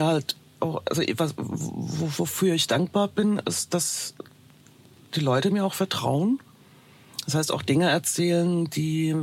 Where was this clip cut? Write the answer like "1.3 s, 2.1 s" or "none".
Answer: none